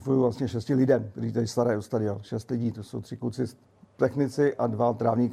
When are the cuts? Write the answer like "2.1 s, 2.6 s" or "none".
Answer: none